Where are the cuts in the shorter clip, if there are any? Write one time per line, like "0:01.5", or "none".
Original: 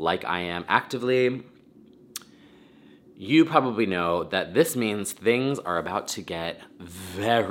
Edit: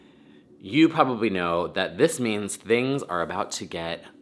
none